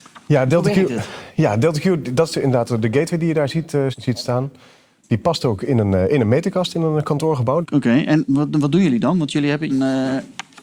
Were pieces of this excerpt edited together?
yes; 3 cuts; at 3.9 s, 7.6 s, 9.7 s

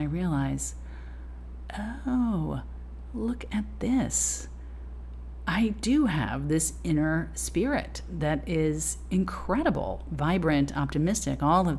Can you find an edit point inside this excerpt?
no; 0 cuts

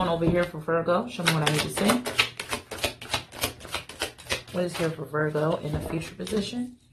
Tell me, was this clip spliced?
no; 0 cuts

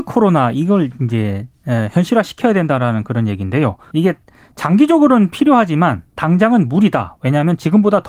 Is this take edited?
yes; 1 cut; at 3.9 s

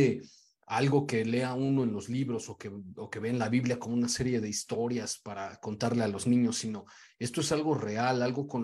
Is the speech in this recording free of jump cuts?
yes; 0 cuts

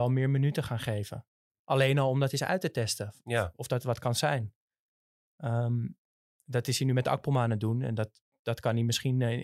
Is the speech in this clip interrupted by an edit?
no; 0 cuts

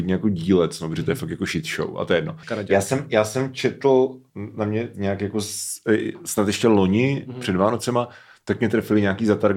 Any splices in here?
yes; 1 cut; at 2.4 s

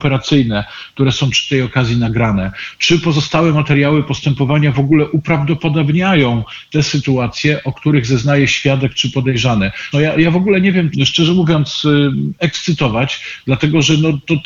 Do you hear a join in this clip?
yes; 2 cuts; at 9.9 s, 10.9 s

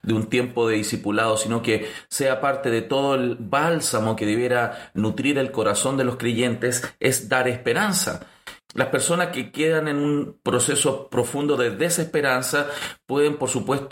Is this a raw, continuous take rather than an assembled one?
no; 1 cut; at 8.6 s

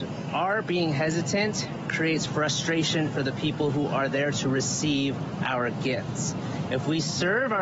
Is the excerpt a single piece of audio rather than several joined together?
yes; 0 cuts

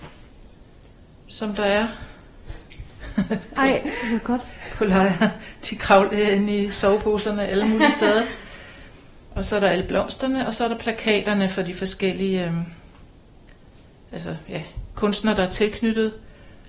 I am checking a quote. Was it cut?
no; 0 cuts

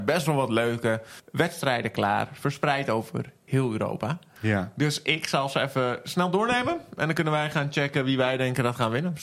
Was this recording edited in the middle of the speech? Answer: no; 0 cuts

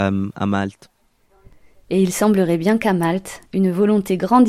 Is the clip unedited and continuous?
yes; 0 cuts

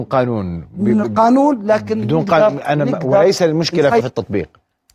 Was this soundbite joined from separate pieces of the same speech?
yes; 1 cut; at 4.0 s

